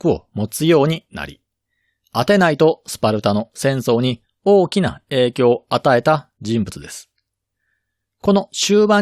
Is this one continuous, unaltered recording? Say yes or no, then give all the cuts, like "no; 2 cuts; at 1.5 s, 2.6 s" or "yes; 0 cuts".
yes; 0 cuts